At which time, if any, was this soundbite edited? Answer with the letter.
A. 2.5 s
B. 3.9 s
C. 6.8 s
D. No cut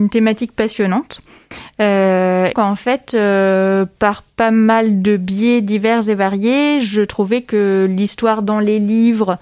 A